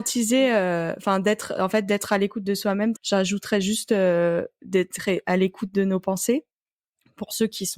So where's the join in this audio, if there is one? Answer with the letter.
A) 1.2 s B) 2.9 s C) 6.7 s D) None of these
B